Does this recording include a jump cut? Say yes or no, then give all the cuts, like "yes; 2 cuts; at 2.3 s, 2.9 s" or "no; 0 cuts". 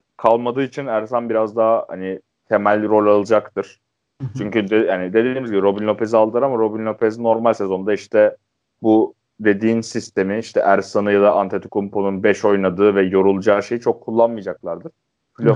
no; 0 cuts